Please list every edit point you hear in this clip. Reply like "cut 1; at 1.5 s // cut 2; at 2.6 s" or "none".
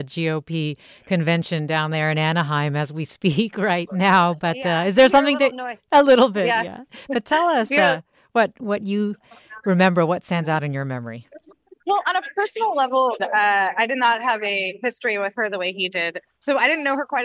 cut 1; at 11.8 s // cut 2; at 13.2 s

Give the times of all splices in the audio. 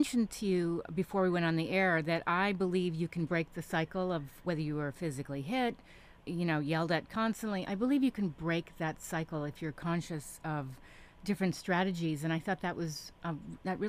none

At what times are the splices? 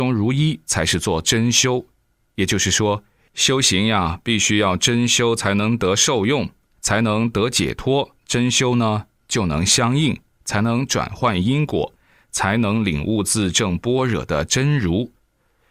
cut 1; at 8.2 s // cut 2; at 10.4 s

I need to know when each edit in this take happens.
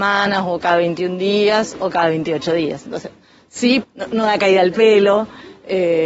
cut 1; at 3.8 s

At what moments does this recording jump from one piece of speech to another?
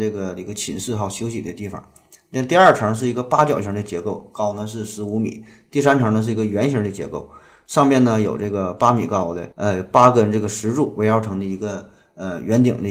cut 1; at 9.5 s

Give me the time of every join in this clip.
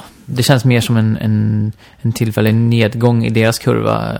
none

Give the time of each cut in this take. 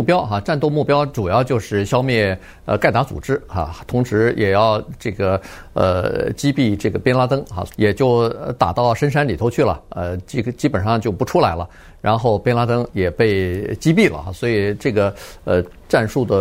cut 1; at 7.7 s

